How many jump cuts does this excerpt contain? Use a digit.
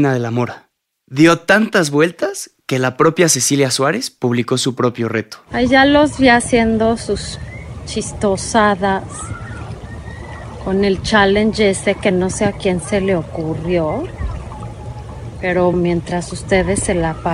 1